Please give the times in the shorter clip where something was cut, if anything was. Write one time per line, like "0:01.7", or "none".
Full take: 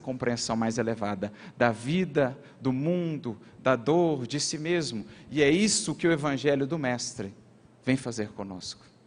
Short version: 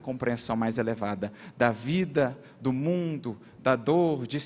none